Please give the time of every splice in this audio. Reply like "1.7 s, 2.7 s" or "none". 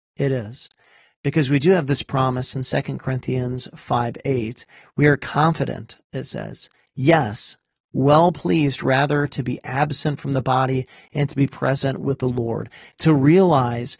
none